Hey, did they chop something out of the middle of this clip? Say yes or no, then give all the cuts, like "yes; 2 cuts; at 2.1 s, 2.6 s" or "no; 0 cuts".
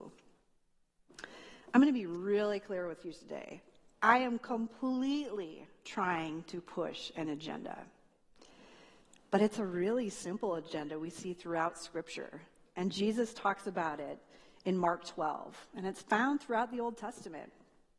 no; 0 cuts